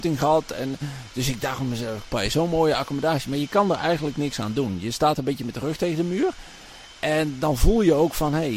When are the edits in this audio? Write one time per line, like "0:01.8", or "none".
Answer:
0:02.1